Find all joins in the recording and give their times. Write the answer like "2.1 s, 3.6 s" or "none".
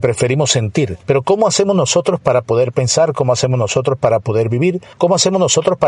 1.0 s